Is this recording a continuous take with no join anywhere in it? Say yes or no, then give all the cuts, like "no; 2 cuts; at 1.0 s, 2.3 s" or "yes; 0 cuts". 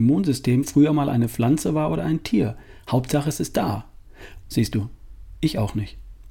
no; 1 cut; at 4.4 s